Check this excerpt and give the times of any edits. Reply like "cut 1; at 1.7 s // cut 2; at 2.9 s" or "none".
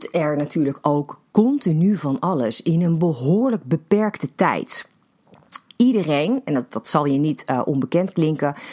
none